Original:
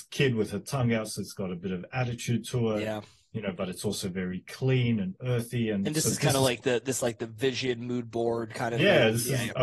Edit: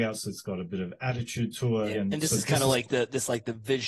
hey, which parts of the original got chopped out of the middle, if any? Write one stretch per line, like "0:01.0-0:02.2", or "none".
0:02.8-0:05.7